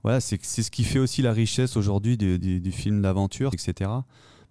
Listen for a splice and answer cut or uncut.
cut